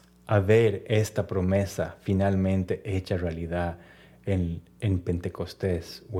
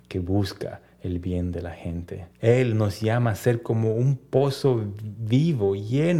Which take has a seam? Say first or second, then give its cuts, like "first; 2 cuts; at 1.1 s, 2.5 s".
second; 1 cut; at 2.3 s